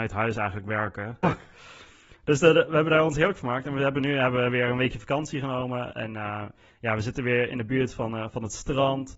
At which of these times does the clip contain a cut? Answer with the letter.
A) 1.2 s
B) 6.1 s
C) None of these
A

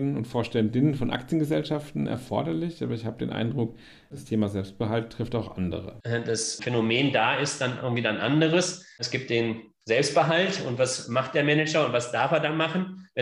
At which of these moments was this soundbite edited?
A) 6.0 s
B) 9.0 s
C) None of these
A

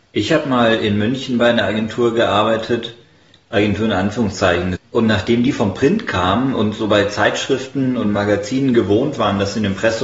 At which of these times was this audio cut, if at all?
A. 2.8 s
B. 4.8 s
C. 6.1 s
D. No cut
B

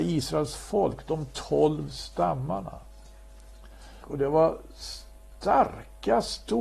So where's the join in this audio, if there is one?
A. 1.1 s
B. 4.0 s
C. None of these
B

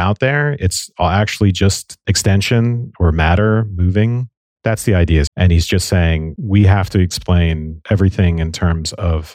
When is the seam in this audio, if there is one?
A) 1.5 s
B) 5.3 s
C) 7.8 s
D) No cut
B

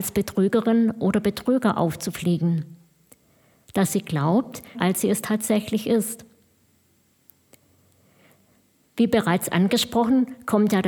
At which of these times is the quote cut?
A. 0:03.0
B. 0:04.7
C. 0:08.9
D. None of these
B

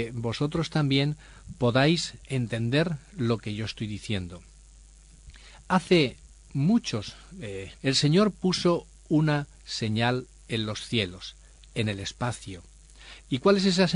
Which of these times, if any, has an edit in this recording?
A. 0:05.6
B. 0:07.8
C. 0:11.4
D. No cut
B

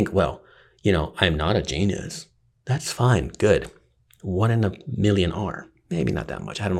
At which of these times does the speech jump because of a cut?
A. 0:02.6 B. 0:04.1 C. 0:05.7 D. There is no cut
D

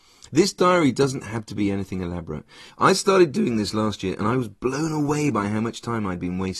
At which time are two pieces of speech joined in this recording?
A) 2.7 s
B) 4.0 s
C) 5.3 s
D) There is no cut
A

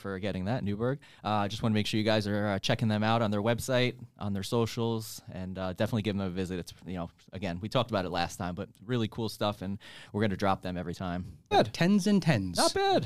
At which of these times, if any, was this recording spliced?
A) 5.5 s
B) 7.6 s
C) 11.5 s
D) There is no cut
C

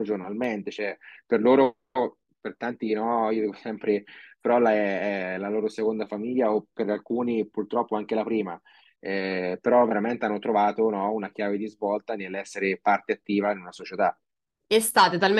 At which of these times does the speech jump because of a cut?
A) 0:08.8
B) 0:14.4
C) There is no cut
C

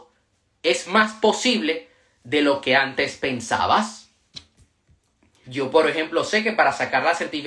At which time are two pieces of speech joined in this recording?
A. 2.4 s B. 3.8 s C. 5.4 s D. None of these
C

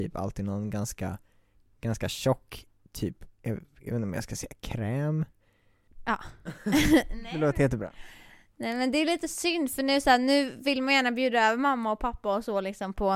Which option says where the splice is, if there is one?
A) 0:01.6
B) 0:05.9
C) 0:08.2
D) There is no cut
B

